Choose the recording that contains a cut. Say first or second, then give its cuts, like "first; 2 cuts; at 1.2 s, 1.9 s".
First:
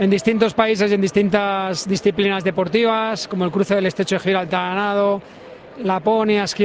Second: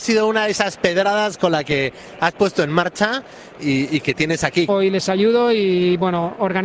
second; 1 cut; at 4.7 s